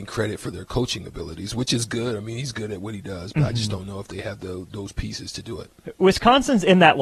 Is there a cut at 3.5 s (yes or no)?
no